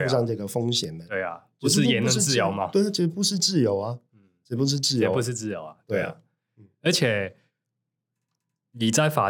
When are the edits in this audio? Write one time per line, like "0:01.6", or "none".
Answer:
none